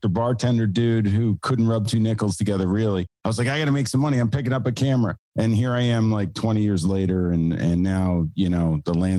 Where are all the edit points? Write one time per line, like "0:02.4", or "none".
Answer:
none